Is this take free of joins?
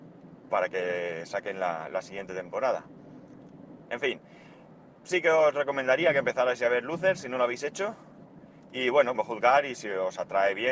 no; 2 cuts; at 3.8 s, 9.1 s

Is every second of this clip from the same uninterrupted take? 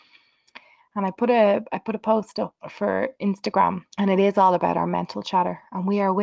no; 2 cuts; at 2.6 s, 3.9 s

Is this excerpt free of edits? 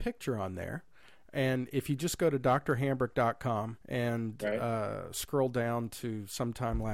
no; 1 cut; at 3.8 s

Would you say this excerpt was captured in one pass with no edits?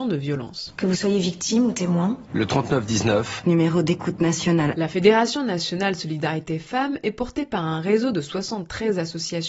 yes; 0 cuts

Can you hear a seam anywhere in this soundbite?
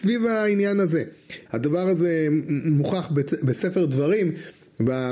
yes; 1 cut; at 1.4 s

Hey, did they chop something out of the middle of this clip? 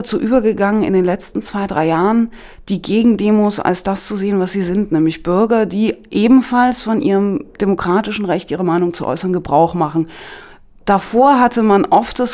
no; 0 cuts

